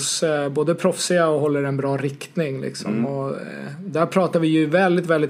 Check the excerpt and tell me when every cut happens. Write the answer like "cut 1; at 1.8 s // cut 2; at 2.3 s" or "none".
none